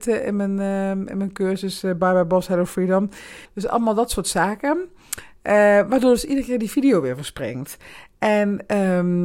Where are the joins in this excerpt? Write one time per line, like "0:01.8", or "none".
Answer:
0:03.4